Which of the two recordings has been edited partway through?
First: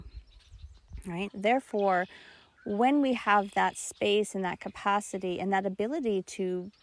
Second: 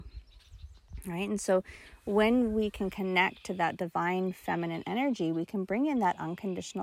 first; 1 cut; at 1.3 s

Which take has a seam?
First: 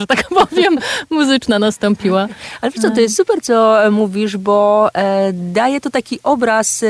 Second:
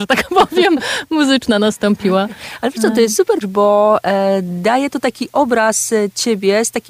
second; 1 cut; at 3.4 s

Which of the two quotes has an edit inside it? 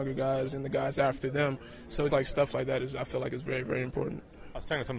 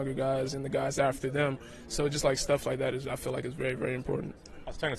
first; 1 cut; at 2.1 s

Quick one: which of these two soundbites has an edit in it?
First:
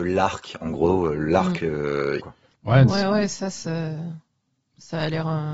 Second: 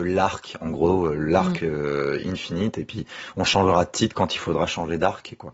first; 1 cut; at 2.2 s

